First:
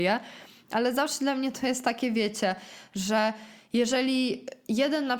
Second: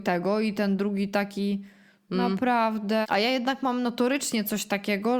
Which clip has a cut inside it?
second; 1 cut; at 3.0 s

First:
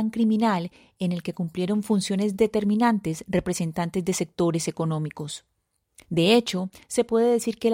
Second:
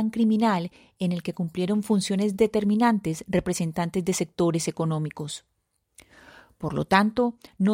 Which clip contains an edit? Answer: first; 1 cut; at 6.0 s

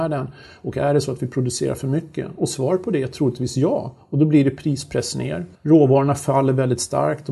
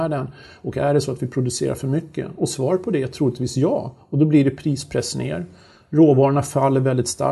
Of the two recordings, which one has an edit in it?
first; 1 cut; at 5.5 s

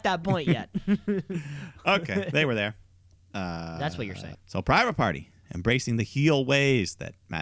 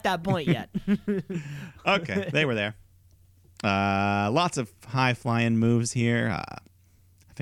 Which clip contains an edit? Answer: first; 2 cuts; at 3.2 s, 4.3 s

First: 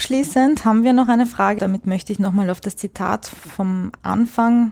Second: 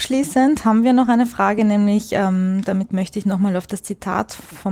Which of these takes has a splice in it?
first; 1 cut; at 1.6 s

